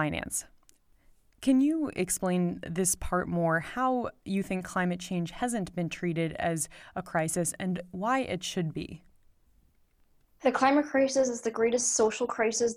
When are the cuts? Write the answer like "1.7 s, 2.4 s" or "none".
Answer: none